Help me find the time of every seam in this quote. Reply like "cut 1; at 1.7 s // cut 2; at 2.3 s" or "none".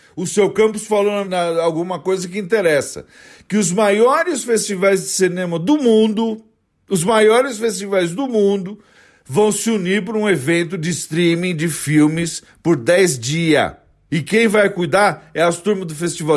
cut 1; at 1.2 s // cut 2; at 14.1 s